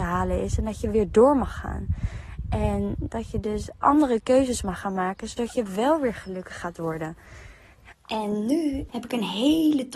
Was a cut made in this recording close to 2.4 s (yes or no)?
no